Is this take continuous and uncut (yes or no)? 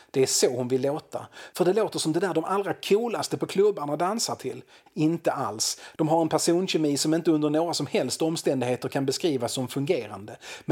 no